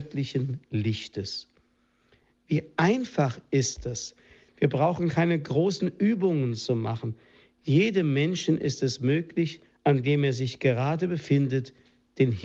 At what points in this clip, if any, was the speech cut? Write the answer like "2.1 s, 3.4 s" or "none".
4.5 s, 9.8 s